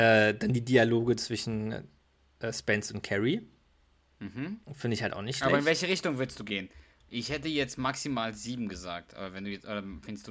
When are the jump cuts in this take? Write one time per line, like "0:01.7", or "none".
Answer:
0:04.6